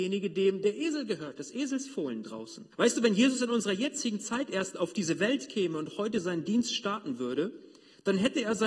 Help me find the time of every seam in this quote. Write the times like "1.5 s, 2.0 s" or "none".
2.7 s

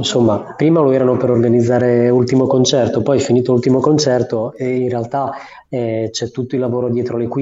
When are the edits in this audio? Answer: none

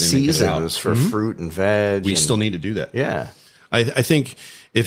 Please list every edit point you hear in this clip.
none

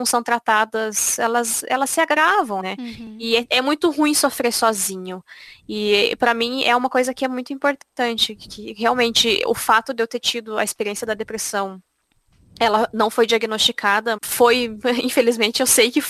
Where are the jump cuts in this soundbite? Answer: 2.6 s, 14.2 s

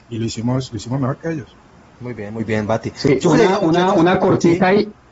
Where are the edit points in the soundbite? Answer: none

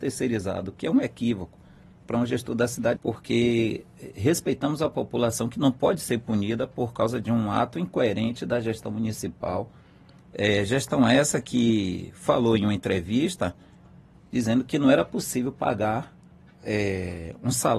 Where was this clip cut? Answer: 3.0 s

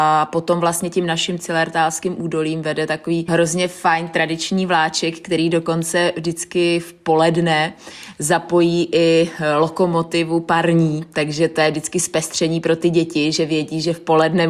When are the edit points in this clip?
3.3 s

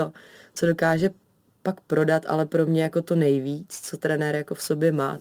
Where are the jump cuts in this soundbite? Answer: none

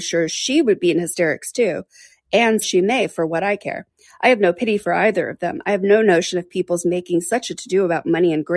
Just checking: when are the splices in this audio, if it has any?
2.6 s

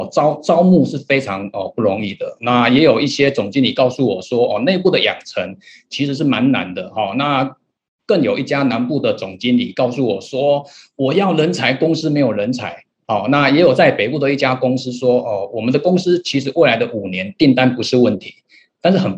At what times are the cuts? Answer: none

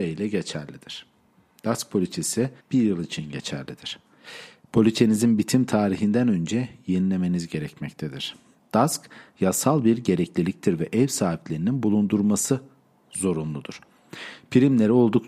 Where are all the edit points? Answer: 2.6 s, 8.6 s

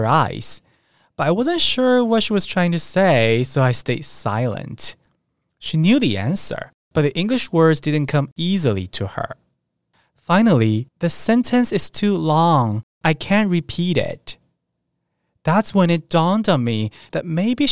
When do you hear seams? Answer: 10.9 s

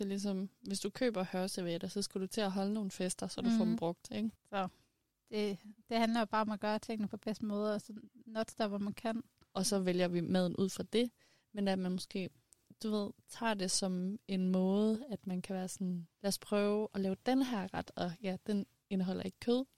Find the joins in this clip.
9.4 s, 16.1 s

